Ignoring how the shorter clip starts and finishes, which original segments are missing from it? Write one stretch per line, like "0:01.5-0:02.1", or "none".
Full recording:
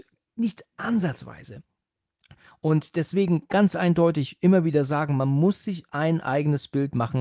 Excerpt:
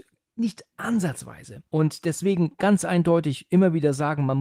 0:01.7-0:02.6